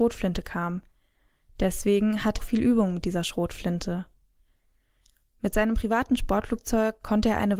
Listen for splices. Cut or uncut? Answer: cut